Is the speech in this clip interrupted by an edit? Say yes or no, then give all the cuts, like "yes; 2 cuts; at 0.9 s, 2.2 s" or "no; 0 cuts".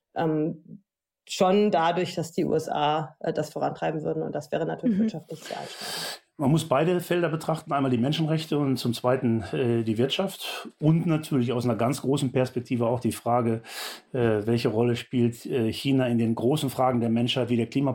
no; 0 cuts